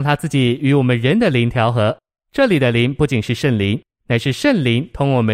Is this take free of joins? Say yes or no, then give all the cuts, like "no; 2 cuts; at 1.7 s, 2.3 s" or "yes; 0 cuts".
yes; 0 cuts